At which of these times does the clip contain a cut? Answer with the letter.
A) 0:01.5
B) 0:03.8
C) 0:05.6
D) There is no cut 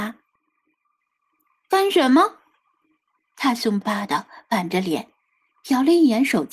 B